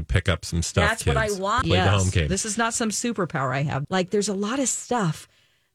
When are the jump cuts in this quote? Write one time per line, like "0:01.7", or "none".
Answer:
0:01.6
0:03.8